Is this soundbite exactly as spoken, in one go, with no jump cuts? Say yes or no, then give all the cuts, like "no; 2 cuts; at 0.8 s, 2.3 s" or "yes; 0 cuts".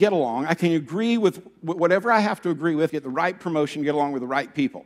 no; 1 cut; at 2.9 s